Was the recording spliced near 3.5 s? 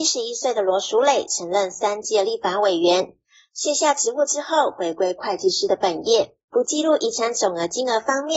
no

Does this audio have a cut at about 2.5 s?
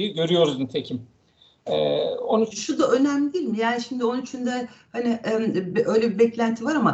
yes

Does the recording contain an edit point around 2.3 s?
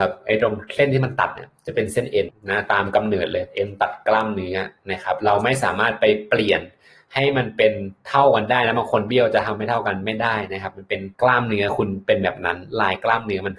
yes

